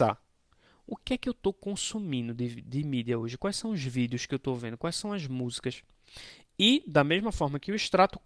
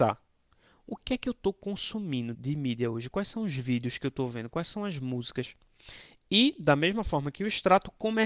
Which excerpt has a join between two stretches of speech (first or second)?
second